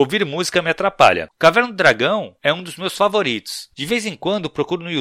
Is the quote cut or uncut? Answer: cut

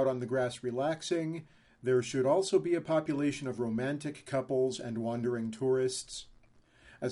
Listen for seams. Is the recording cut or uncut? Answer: uncut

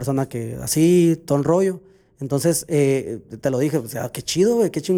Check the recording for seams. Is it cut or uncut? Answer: uncut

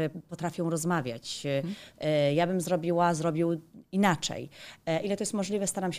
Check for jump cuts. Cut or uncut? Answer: cut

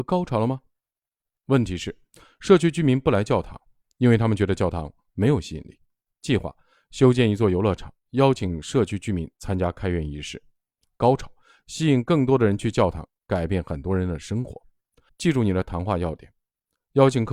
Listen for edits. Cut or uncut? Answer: cut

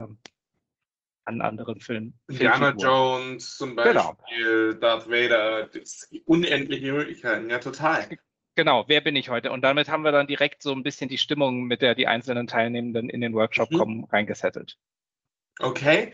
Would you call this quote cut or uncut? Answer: uncut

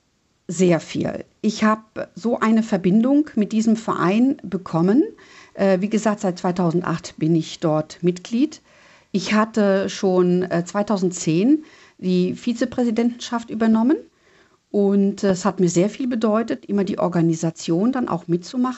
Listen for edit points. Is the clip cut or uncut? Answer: uncut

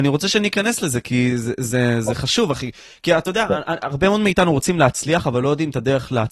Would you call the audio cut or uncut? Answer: uncut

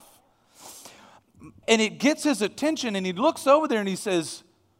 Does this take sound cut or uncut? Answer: cut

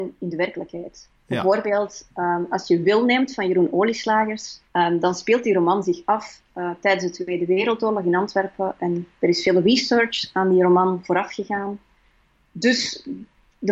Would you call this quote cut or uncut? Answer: cut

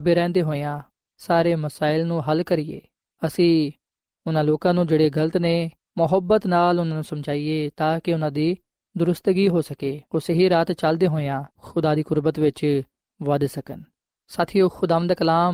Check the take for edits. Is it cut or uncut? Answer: cut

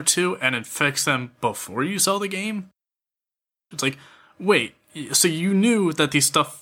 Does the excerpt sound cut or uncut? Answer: cut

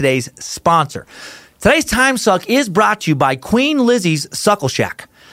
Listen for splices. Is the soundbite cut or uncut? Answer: uncut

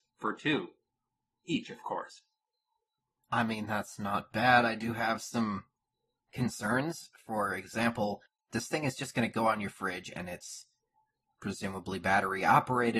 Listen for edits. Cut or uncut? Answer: uncut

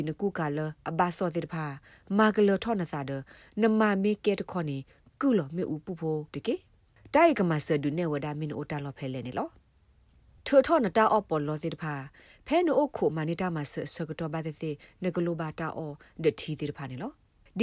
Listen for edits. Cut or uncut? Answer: uncut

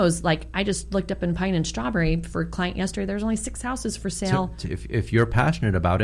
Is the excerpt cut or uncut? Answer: cut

